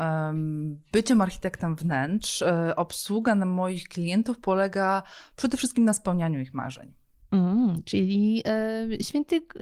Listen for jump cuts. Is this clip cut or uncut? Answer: uncut